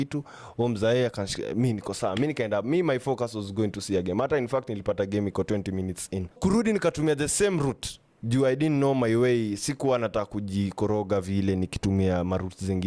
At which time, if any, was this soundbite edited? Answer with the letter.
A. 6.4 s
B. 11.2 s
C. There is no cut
A